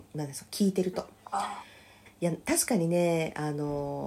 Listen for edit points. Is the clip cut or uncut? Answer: cut